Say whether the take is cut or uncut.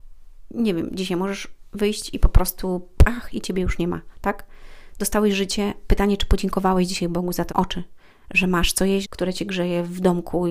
cut